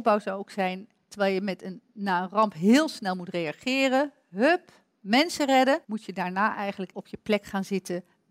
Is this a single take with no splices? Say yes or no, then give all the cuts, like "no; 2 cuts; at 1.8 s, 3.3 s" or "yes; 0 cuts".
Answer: no; 2 cuts; at 5.8 s, 6.9 s